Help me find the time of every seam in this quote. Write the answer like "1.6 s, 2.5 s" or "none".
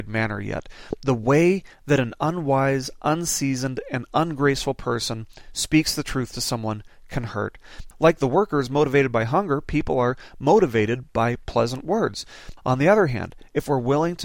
7.9 s, 12.6 s

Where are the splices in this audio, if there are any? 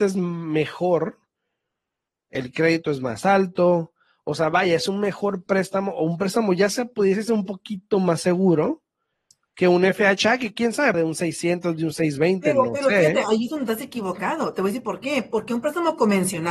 10.9 s

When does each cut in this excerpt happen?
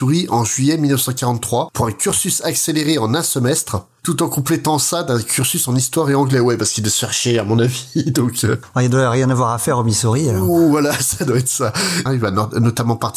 12.1 s

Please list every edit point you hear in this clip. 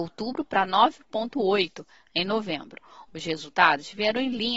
3.1 s

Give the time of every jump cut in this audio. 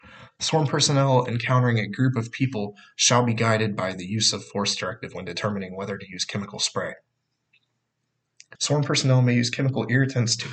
2.9 s, 8.6 s

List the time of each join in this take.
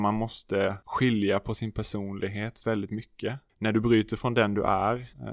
none

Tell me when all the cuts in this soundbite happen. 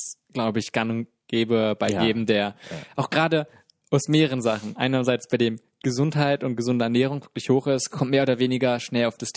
none

